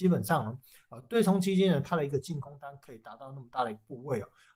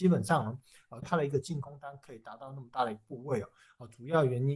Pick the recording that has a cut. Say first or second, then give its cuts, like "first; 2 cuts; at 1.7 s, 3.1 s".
second; 1 cut; at 1.0 s